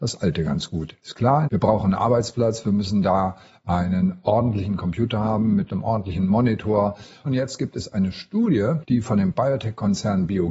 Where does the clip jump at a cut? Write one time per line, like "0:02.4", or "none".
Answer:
0:01.5
0:07.3